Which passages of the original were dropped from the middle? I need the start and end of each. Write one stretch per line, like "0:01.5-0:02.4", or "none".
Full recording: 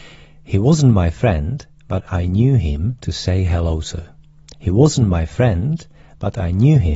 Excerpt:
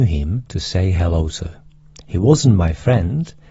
none